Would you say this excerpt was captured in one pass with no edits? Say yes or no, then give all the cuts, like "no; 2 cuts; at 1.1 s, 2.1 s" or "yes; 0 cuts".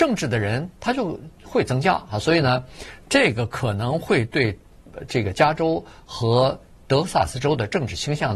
yes; 0 cuts